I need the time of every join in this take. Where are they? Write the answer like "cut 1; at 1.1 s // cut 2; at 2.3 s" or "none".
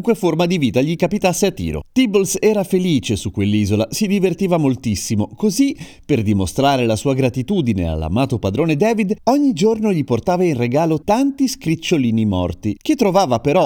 cut 1; at 11.0 s